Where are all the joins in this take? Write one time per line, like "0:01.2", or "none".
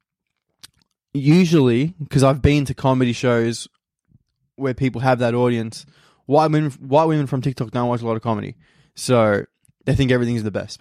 none